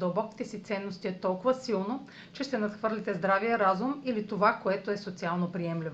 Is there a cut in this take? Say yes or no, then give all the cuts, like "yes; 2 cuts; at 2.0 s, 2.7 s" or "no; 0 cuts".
no; 0 cuts